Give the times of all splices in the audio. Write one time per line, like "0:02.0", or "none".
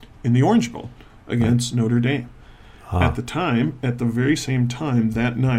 none